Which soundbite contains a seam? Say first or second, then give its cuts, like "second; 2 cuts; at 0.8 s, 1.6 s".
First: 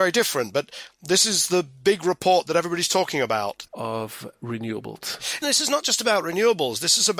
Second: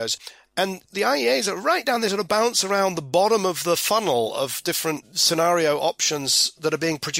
first; 1 cut; at 3.7 s